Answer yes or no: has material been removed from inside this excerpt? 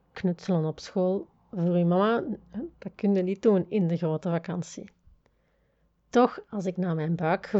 no